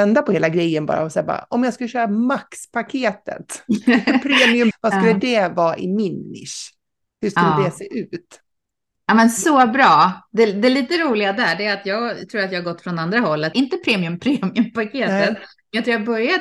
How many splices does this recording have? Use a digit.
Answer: 2